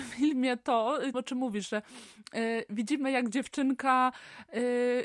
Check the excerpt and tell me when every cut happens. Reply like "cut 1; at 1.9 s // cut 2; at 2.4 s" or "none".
cut 1; at 1.1 s